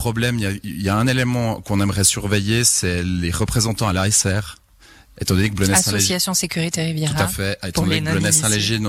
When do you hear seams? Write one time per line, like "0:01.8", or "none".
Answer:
none